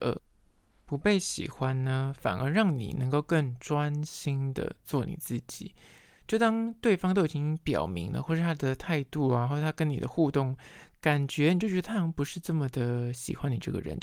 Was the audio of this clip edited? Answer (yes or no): no